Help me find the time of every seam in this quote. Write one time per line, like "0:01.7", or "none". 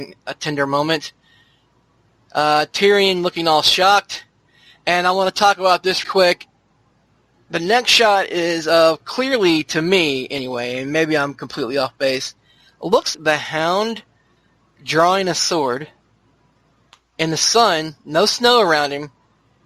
0:06.0
0:13.1